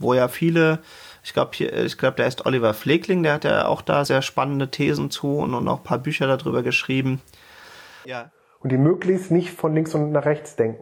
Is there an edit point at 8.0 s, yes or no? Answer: yes